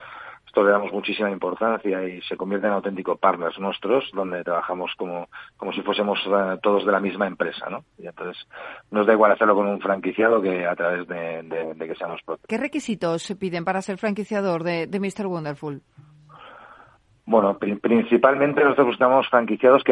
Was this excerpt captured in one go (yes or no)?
no